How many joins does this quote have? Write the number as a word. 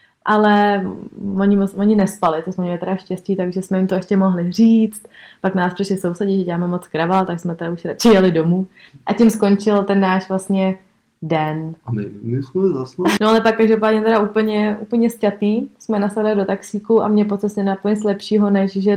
two